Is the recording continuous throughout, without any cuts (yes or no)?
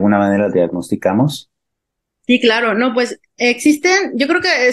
yes